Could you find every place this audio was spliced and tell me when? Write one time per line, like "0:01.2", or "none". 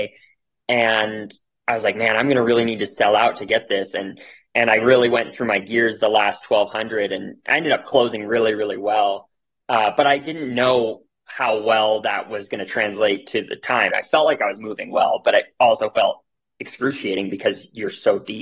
0:13.9